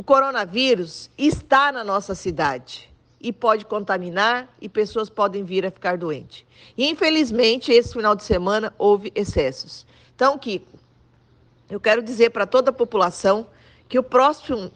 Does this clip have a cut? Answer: no; 0 cuts

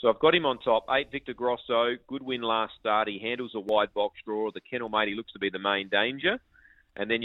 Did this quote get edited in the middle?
no; 0 cuts

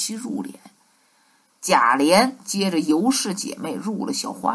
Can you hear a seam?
yes; 1 cut; at 1.5 s

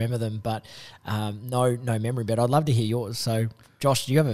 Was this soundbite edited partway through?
no; 0 cuts

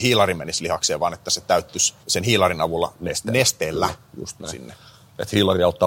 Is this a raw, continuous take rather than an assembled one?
no; 1 cut; at 2.0 s

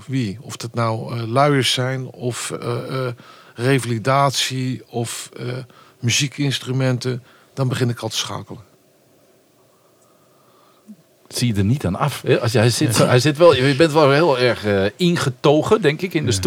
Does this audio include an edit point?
no; 0 cuts

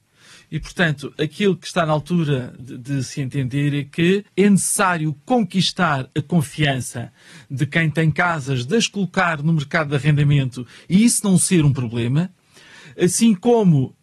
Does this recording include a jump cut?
yes; 2 cuts; at 2.6 s, 4.3 s

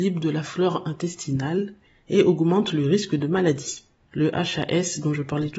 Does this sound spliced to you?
yes; 1 cut; at 4.1 s

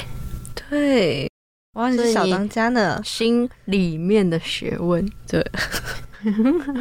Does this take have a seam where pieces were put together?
no; 0 cuts

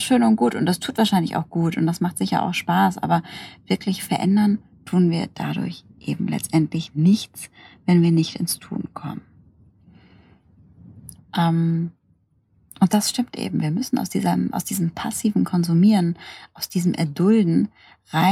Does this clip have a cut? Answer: yes; 1 cut; at 11.2 s

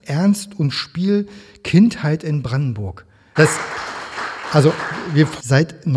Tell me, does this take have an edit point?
yes; 1 cut; at 3.4 s

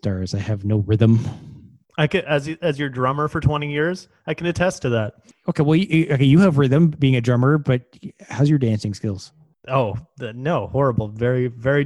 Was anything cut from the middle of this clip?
no; 0 cuts

